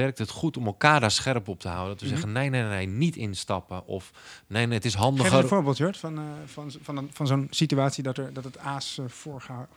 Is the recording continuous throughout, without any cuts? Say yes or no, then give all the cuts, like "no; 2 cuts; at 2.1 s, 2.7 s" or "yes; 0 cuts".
yes; 0 cuts